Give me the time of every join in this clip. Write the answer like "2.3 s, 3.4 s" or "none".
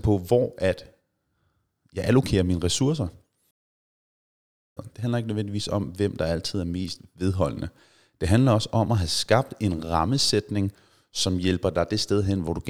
4.8 s